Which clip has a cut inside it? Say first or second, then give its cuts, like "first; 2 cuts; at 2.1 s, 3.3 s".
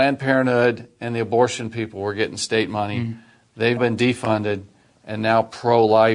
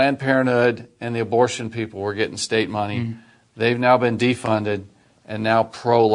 first; 1 cut; at 3.8 s